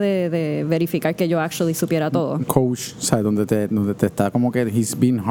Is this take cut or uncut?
cut